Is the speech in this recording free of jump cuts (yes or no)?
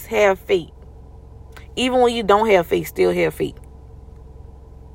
yes